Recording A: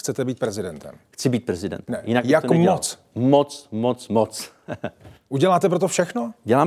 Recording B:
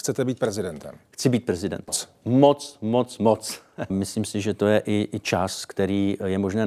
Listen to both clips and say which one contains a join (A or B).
B